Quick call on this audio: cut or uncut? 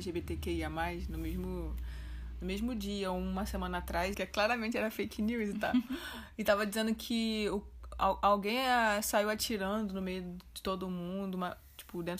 cut